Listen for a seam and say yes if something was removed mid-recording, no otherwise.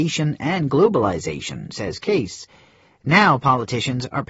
no